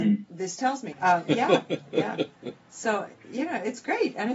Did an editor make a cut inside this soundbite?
yes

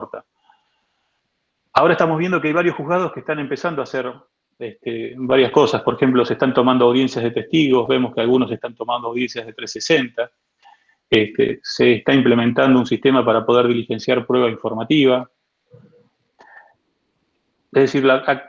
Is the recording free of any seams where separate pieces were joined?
yes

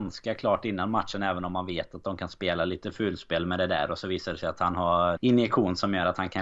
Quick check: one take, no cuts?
no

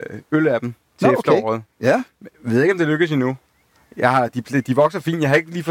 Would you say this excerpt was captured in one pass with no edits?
yes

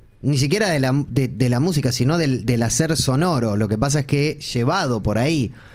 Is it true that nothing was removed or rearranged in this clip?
yes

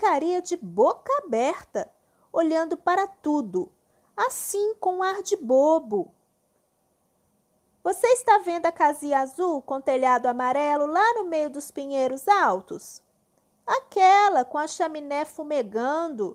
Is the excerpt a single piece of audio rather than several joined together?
yes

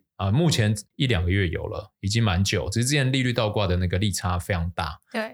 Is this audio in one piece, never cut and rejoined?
yes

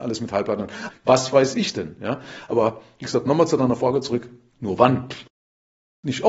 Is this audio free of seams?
no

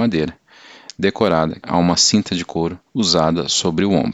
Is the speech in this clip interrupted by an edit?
yes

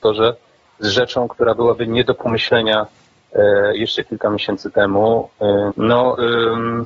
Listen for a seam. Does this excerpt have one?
yes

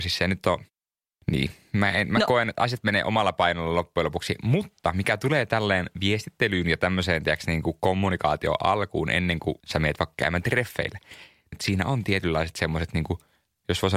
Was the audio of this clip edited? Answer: yes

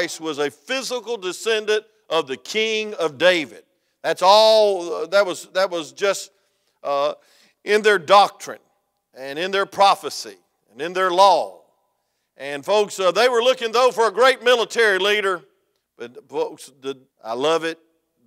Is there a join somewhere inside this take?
yes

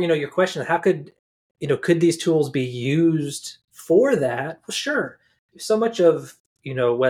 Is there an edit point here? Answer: no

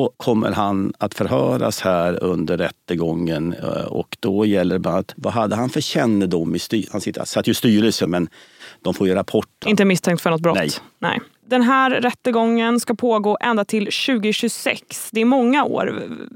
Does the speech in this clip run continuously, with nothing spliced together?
no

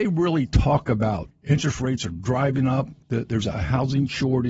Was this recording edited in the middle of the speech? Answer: yes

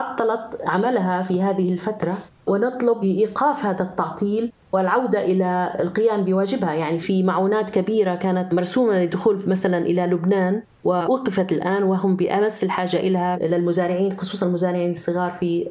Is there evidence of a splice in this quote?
no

